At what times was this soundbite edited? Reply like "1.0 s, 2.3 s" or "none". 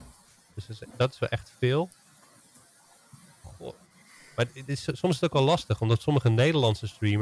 none